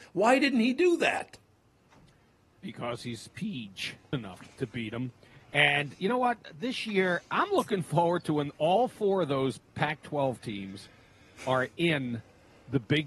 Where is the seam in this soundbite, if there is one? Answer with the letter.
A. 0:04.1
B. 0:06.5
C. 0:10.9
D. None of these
A